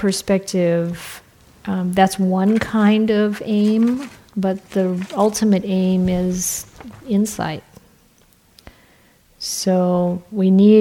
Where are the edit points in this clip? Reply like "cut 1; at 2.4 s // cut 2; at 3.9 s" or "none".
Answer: none